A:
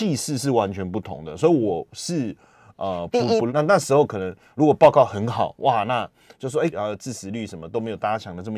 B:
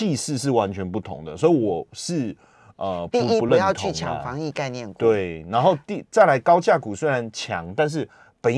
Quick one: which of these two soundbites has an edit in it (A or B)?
A